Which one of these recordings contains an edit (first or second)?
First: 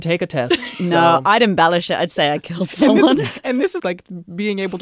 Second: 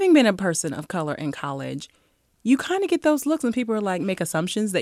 first